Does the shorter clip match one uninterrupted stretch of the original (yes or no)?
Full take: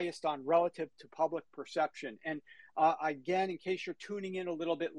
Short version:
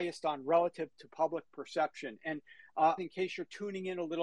no